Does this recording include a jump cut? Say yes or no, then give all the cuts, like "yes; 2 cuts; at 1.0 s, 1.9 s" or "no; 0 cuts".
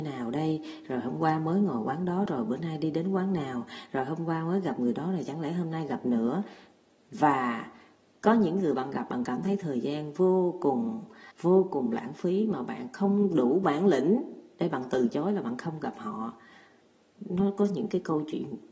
yes; 1 cut; at 11.3 s